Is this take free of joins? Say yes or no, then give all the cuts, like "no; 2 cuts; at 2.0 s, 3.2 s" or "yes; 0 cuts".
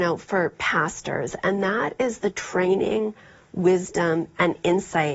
yes; 0 cuts